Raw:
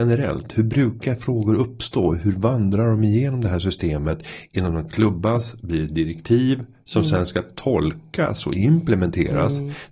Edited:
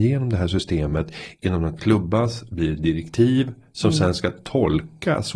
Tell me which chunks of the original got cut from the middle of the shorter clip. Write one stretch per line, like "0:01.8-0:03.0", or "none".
none